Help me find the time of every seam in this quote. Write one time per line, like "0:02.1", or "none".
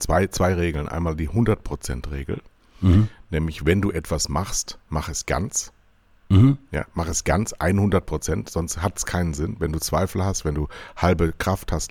none